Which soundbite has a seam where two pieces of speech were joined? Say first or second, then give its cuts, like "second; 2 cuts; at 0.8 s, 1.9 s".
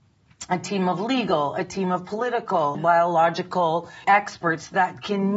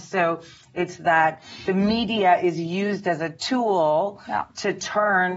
first; 2 cuts; at 2.7 s, 4.0 s